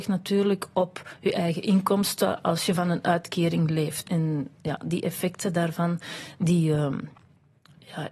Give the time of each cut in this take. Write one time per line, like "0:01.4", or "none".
0:04.0